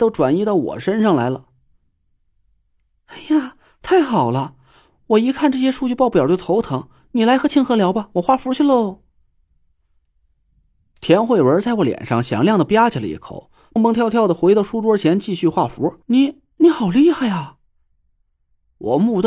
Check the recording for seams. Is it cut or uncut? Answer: cut